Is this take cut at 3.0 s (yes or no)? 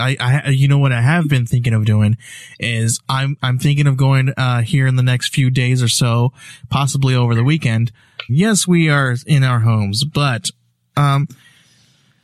yes